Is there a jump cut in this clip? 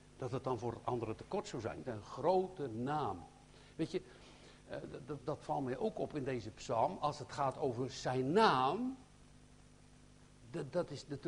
yes; 1 cut; at 1.8 s

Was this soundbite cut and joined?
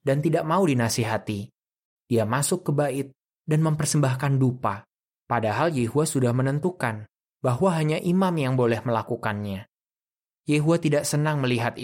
no; 0 cuts

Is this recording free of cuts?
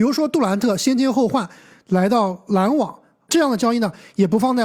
yes; 0 cuts

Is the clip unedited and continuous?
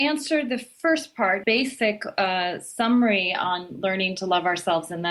no; 1 cut; at 1.4 s

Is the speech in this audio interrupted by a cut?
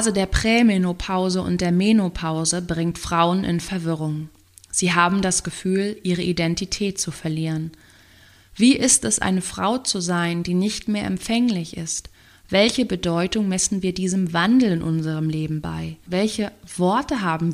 yes; 1 cut; at 16.1 s

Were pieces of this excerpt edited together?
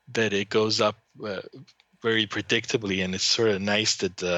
no; 0 cuts

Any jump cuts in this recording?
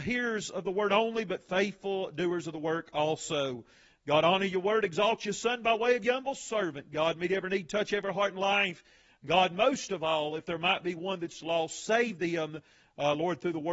no; 0 cuts

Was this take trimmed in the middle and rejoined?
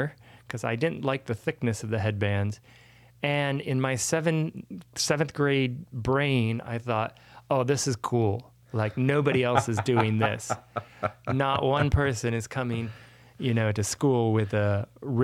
no; 0 cuts

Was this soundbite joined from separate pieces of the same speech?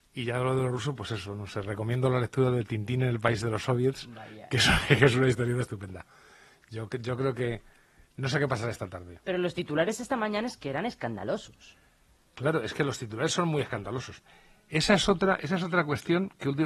no; 0 cuts

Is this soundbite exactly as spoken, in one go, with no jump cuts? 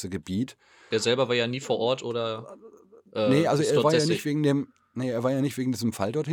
no; 1 cut; at 0.9 s

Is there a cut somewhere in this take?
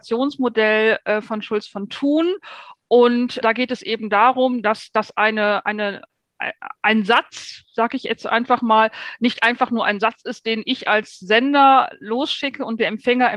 yes; 1 cut; at 3.4 s

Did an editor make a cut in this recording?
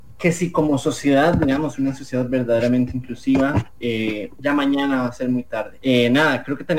yes; 2 cuts; at 4.4 s, 5.8 s

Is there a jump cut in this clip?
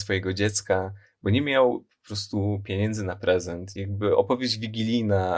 no; 0 cuts

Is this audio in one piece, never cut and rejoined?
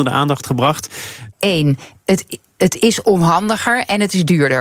no; 1 cut; at 1.3 s

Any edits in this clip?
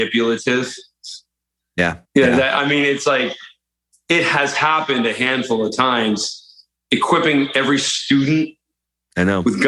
yes; 1 cut; at 2.1 s

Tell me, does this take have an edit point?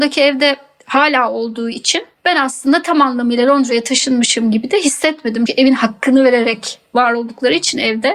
yes; 1 cut; at 5.5 s

